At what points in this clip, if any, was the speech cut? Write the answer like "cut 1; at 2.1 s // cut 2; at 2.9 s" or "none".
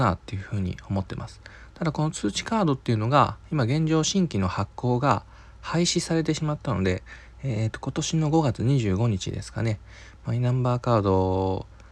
none